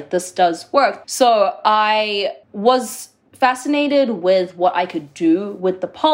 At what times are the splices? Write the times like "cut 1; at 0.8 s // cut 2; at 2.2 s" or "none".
cut 1; at 1.0 s // cut 2; at 2.4 s

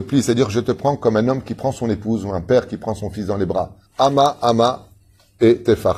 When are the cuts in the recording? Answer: cut 1; at 3.9 s

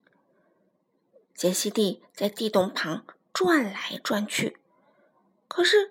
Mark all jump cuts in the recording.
cut 1; at 1.2 s

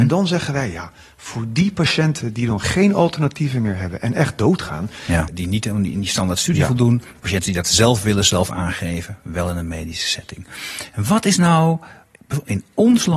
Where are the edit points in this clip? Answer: cut 1; at 5.3 s

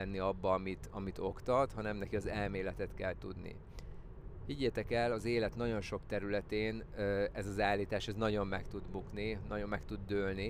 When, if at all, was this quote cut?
none

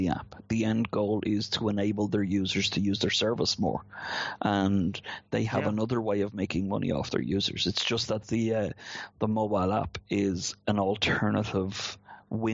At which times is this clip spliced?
none

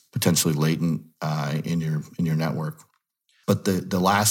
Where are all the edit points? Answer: none

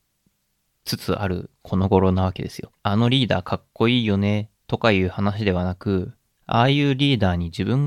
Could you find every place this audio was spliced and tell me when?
cut 1; at 2.8 s

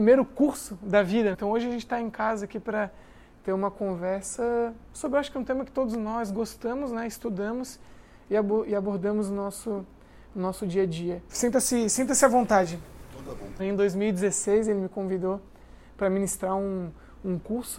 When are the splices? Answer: cut 1; at 1.3 s // cut 2; at 11.3 s // cut 3; at 13.6 s

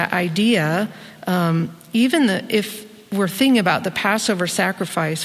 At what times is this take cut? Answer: none

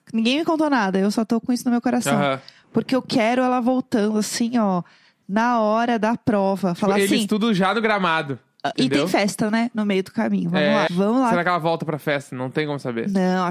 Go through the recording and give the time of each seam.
cut 1; at 8.7 s // cut 2; at 10.9 s

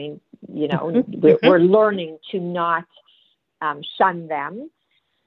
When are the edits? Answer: cut 1; at 2.2 s

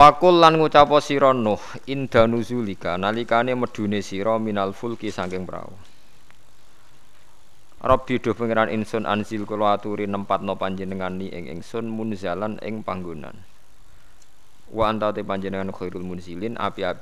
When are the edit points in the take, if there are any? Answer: cut 1; at 7.8 s // cut 2; at 14.7 s

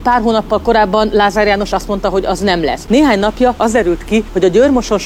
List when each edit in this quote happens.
cut 1; at 2.9 s

